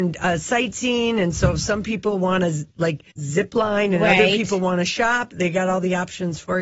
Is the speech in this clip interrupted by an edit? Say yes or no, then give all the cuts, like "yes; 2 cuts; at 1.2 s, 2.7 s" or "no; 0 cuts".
yes; 1 cut; at 3.1 s